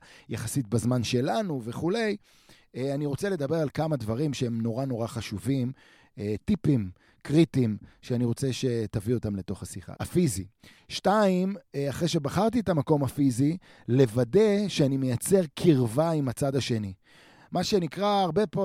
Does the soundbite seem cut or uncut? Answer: cut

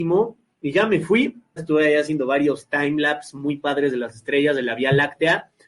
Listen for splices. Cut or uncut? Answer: cut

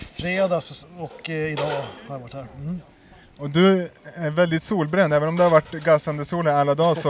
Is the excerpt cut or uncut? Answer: uncut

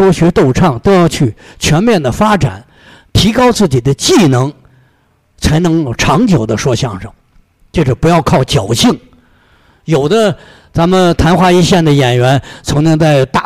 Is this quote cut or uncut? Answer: uncut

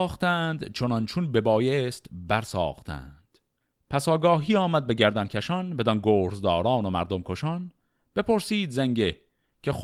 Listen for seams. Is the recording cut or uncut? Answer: uncut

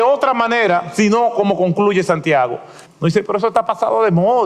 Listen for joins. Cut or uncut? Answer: cut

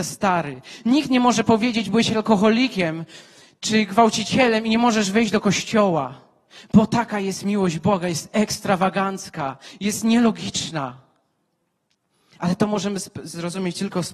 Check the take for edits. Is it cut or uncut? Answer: uncut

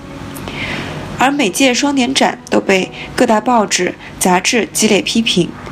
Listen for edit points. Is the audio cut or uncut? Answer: cut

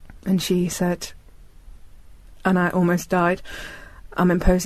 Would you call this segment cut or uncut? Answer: uncut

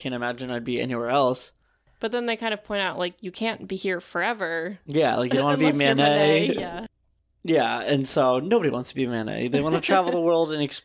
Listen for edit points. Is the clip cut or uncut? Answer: uncut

